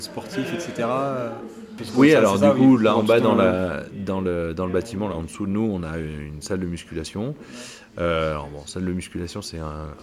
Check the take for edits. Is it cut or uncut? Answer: uncut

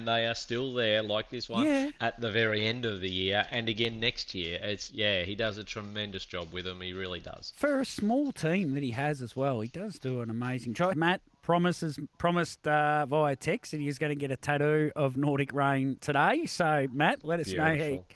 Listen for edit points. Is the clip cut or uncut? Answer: cut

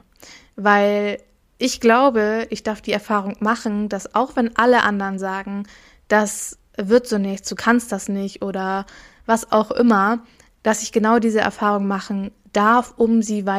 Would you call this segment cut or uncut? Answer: uncut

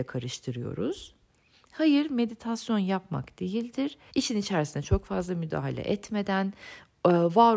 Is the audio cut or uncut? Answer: cut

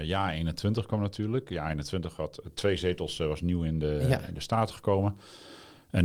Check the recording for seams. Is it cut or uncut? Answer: uncut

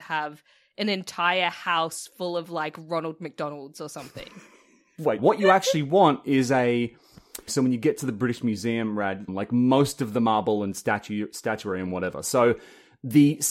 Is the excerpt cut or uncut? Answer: cut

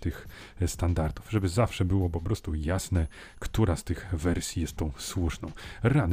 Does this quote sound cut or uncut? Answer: uncut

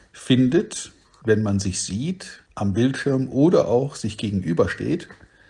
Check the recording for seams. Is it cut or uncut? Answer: cut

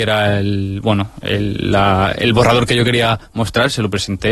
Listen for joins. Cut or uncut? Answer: uncut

